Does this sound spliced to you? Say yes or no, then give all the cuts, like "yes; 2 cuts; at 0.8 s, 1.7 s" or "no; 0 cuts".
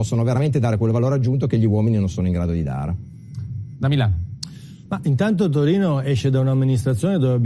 no; 0 cuts